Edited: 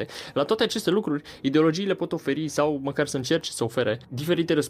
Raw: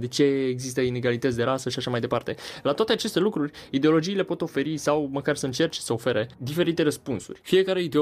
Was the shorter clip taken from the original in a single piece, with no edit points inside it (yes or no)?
yes